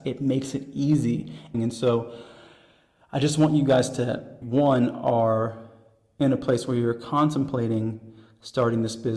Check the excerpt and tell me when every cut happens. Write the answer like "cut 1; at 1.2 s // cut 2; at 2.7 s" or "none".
cut 1; at 1.5 s // cut 2; at 4.4 s